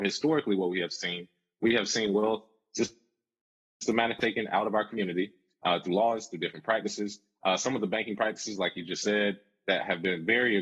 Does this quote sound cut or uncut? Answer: uncut